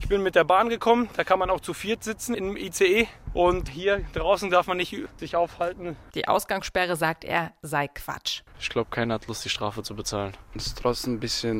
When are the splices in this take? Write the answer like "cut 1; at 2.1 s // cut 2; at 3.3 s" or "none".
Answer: cut 1; at 6.1 s // cut 2; at 8.5 s